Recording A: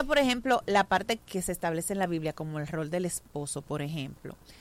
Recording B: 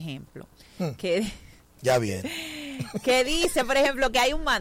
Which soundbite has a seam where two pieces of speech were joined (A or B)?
A